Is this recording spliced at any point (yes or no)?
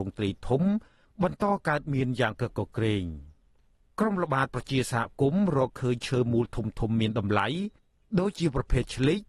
yes